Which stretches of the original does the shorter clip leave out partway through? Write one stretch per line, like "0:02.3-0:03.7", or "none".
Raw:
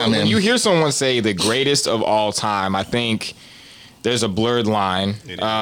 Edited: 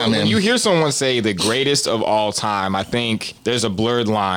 0:03.4-0:04.0